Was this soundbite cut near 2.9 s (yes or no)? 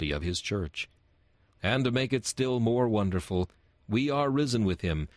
no